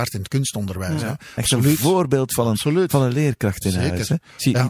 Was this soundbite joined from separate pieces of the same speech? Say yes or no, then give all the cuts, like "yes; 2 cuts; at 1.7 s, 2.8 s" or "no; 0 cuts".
yes; 1 cut; at 1.4 s